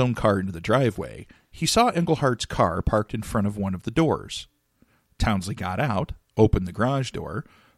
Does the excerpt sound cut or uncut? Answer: uncut